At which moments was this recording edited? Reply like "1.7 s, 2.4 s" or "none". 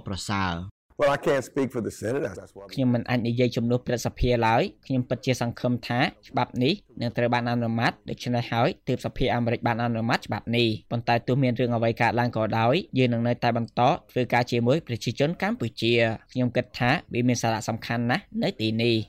2.3 s

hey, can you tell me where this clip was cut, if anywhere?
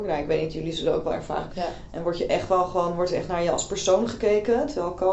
1.5 s

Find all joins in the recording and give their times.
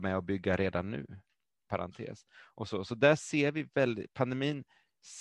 1.7 s

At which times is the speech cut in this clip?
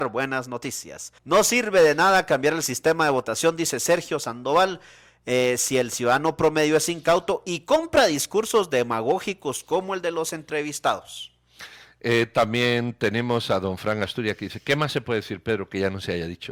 1.2 s

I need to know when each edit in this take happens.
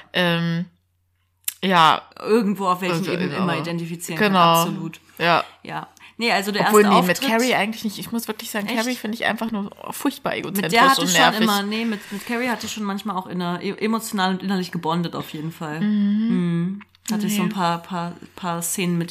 2.1 s

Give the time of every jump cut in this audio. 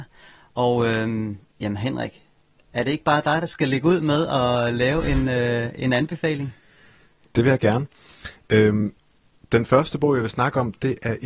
none

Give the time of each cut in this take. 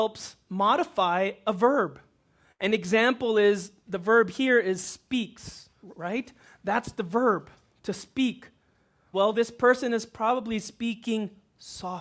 5.8 s, 9.1 s

